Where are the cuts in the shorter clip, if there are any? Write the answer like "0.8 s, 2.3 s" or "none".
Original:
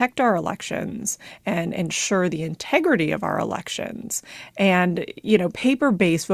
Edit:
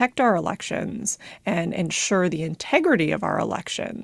none